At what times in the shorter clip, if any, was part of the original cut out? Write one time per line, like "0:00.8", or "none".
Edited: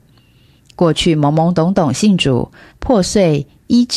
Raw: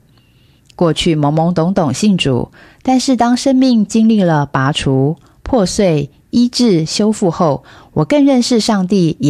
0:02.7

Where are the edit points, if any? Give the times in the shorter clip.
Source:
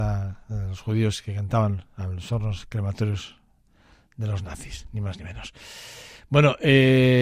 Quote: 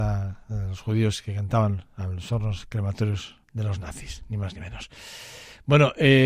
0:03.4

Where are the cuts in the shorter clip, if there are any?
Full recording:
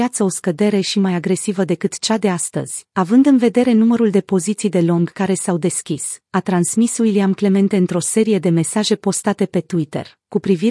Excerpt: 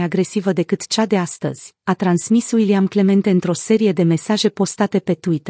0:01.8

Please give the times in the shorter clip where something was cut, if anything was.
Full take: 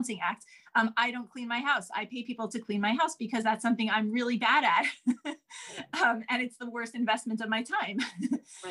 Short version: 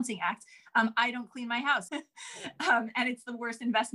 0:01.9

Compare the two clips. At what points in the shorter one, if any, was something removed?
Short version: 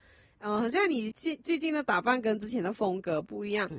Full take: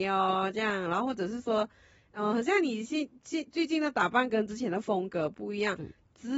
0:01.1

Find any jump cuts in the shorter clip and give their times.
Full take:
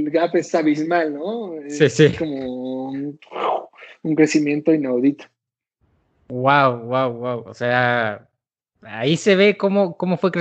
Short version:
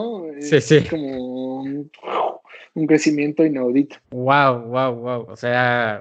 0:04.0

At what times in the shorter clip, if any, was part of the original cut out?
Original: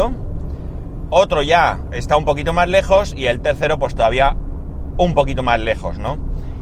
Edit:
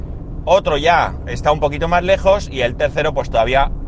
none

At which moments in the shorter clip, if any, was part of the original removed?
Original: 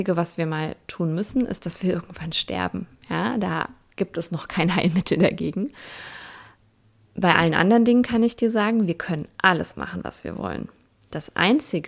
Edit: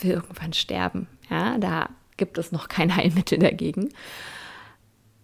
none

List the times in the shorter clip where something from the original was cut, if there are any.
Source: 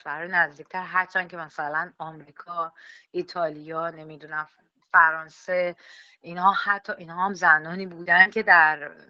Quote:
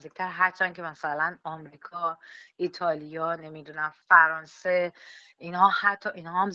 0:04.0

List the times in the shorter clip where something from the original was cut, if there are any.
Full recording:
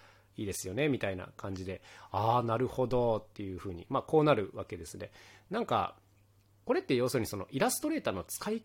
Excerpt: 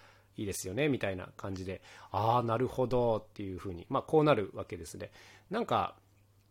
none

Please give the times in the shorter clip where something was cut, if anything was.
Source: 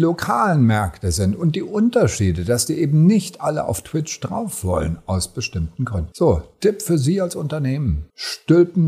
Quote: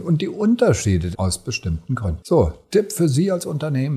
0:01.1

